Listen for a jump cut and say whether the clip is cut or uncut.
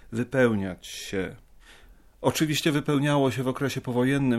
uncut